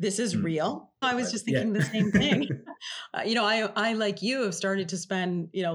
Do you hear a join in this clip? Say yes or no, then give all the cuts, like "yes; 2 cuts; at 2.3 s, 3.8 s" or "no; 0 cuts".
yes; 1 cut; at 1.0 s